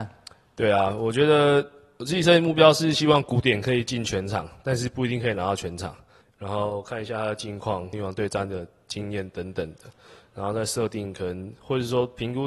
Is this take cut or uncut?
cut